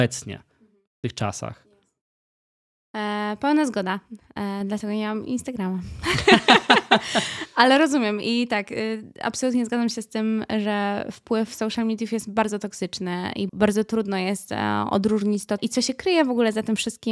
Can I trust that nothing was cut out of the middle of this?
no; 2 cuts; at 13.5 s, 15.6 s

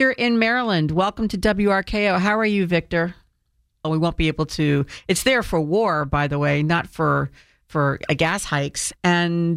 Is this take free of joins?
no; 1 cut; at 3.8 s

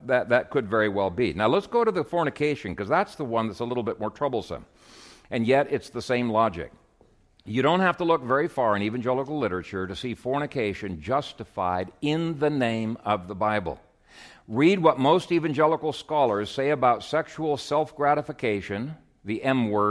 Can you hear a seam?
no; 0 cuts

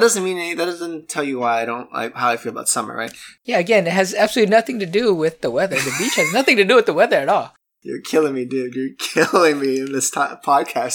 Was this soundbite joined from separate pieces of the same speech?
no; 0 cuts

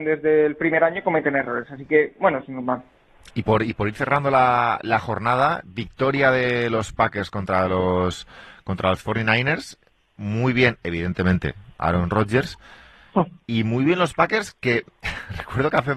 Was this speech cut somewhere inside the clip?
no; 0 cuts

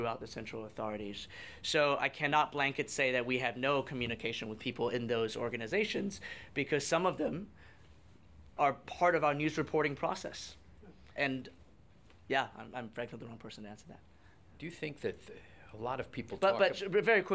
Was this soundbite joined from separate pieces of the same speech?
yes; 2 cuts; at 8.6 s, 11.2 s

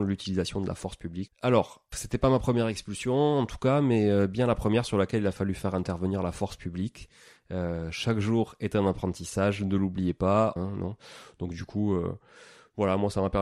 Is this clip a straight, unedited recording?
no; 2 cuts; at 1.3 s, 10.6 s

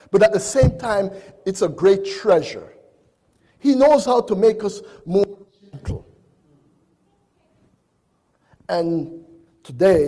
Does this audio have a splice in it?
yes; 2 cuts; at 1.4 s, 3.4 s

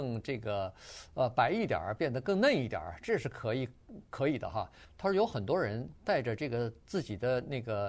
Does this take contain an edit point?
yes; 1 cut; at 4.9 s

